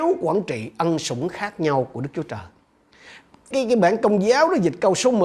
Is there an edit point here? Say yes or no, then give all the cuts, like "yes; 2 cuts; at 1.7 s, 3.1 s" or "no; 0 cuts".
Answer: yes; 1 cut; at 3.5 s